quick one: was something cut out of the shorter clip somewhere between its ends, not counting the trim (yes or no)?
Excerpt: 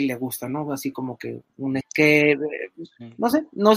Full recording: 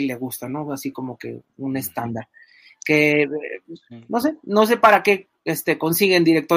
yes